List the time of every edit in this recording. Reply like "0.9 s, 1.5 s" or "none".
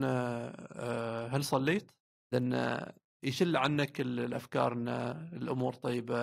2.3 s